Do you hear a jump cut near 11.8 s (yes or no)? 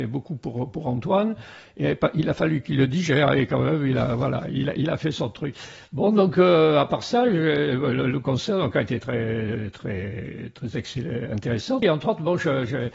yes